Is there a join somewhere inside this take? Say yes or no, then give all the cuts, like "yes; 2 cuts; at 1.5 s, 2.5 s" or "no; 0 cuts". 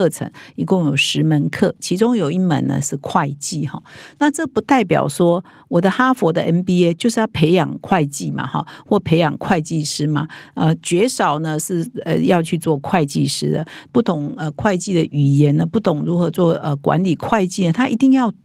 yes; 1 cut; at 13.9 s